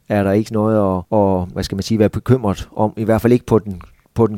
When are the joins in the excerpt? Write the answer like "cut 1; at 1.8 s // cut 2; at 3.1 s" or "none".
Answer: cut 1; at 1.5 s